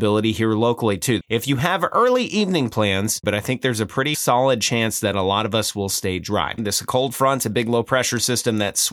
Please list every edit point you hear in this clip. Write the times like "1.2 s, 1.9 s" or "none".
1.2 s, 3.2 s, 6.6 s